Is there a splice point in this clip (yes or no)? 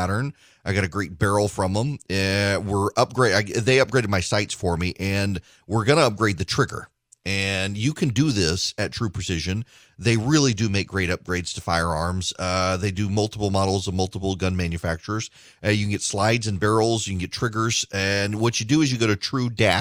no